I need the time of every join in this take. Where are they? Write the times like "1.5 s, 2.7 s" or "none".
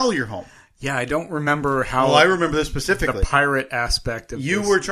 none